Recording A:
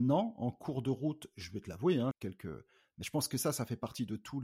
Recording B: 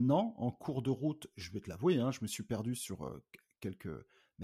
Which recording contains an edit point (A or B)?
A